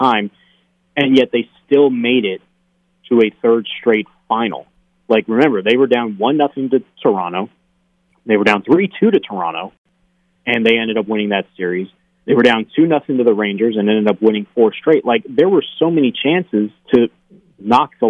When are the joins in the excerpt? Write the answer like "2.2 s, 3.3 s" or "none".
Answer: none